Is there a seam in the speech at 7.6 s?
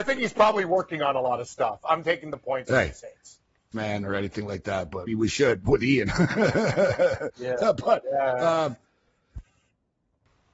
no; 2 cuts; at 3.7 s, 5.1 s

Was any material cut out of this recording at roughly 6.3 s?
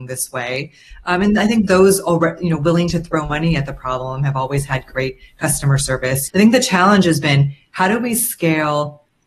yes; 1 cut; at 6.3 s

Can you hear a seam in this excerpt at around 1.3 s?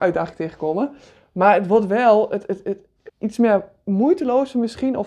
no; 1 cut; at 3.1 s

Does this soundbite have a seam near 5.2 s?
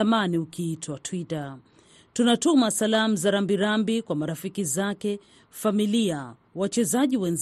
no; 0 cuts

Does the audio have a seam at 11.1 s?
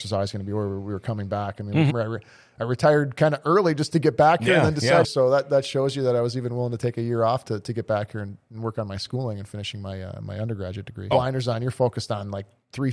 yes; 3 cuts; at 1.9 s, 5.0 s, 11.1 s

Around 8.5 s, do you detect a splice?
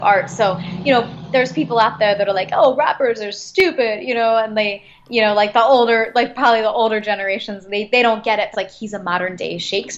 yes; 1 cut; at 8.5 s

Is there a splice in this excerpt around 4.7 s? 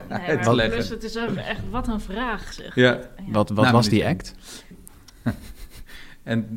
yes; 1 cut; at 4.7 s

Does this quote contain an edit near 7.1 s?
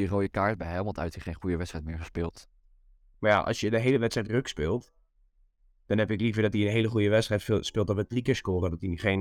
no; 2 cuts; at 1.1 s, 3.1 s

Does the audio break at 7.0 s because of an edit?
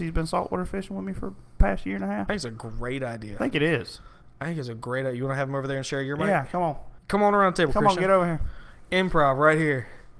yes; 1 cut; at 7.0 s

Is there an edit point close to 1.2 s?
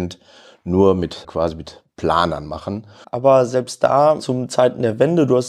yes; 2 cuts; at 1.2 s, 3.0 s

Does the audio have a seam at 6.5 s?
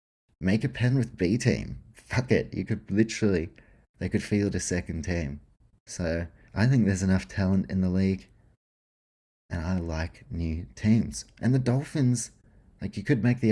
yes; 1 cut; at 6.5 s

